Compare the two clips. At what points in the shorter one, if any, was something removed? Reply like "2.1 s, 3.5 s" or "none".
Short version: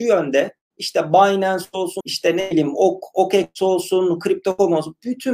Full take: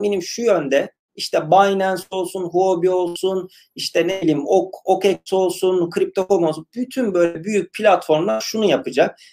2.0 s

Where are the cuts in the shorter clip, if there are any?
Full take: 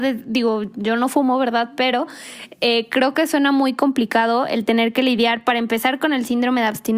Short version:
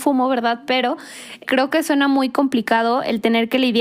1.4 s

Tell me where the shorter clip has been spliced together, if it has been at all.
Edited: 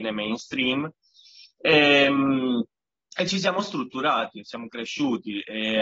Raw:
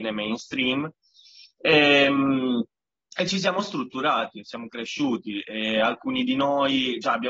none

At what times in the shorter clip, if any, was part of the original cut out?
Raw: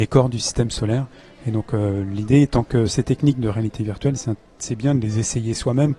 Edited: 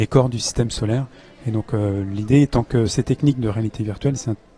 none

